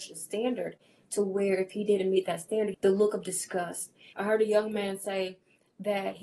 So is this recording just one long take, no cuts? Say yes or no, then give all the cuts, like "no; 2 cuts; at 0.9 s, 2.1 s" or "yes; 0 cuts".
no; 2 cuts; at 2.7 s, 4.1 s